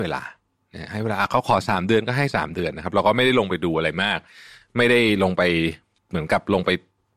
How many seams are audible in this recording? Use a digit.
1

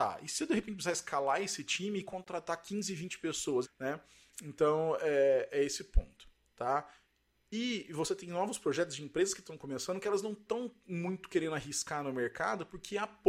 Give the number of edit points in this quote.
1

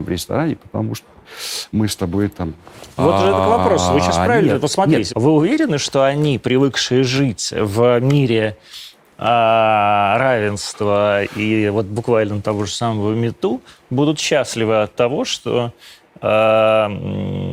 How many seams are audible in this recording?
2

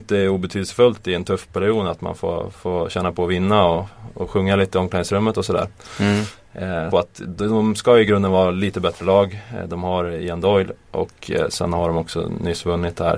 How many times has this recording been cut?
1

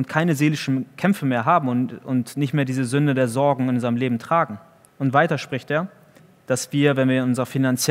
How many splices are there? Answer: 1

